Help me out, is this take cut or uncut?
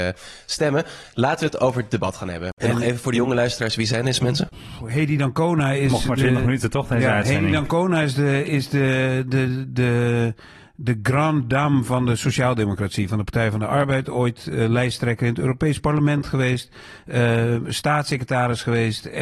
cut